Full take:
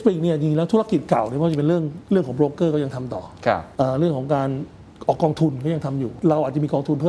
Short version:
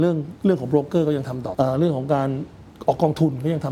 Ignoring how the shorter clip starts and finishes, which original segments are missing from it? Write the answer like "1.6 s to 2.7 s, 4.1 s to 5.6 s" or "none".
3.2 s to 3.7 s